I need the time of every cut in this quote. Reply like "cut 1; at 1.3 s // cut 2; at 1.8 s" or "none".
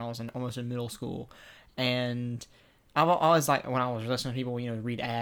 none